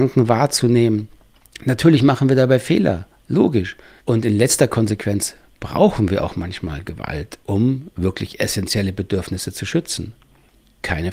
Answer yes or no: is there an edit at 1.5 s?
no